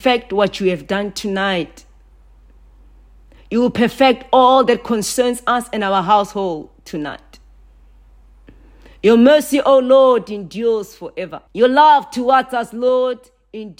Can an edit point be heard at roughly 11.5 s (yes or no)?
yes